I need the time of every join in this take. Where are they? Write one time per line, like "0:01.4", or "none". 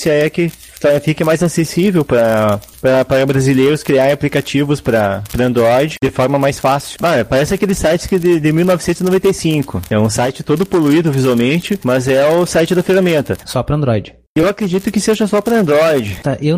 0:07.0
0:13.4